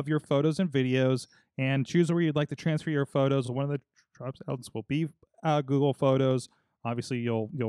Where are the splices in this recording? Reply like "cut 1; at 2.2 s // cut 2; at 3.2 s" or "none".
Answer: none